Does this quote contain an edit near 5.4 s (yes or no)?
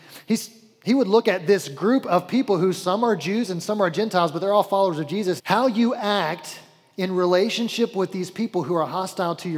yes